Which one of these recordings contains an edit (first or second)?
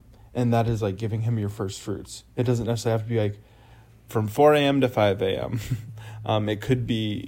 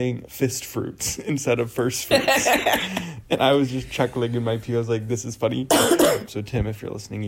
second